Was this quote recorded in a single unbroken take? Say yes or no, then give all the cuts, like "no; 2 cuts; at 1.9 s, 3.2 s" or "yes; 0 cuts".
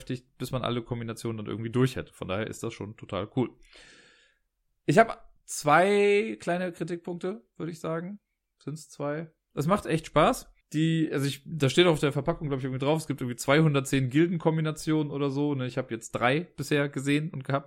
no; 2 cuts; at 9.5 s, 10.6 s